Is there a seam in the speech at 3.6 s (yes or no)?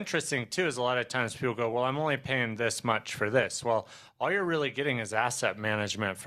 no